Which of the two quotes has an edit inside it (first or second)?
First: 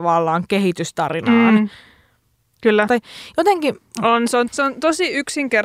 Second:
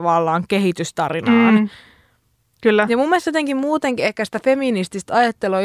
first